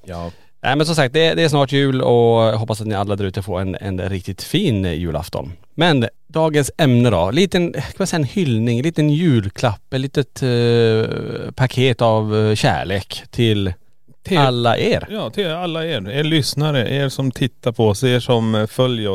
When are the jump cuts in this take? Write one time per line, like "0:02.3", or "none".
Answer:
none